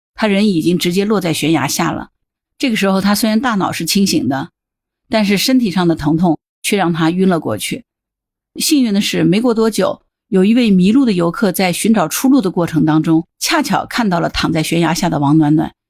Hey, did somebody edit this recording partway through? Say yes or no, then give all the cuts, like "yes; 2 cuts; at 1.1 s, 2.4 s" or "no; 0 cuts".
no; 0 cuts